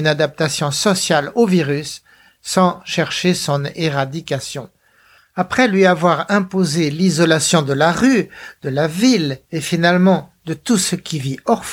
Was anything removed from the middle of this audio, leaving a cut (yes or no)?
yes